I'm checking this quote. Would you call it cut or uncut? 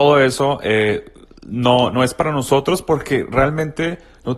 uncut